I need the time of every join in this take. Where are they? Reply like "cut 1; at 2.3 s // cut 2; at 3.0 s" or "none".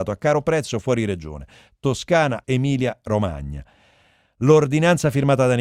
cut 1; at 2.4 s